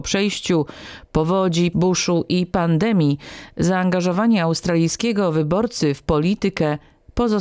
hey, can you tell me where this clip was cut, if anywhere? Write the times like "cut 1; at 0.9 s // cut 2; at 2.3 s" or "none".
cut 1; at 1.7 s